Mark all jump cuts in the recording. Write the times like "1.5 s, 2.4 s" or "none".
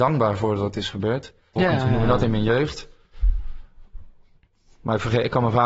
1.6 s